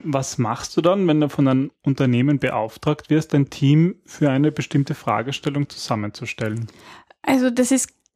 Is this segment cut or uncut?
uncut